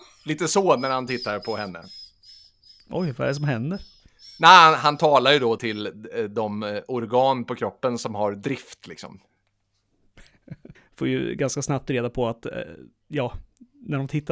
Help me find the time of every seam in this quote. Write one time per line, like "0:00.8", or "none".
0:05.6
0:10.7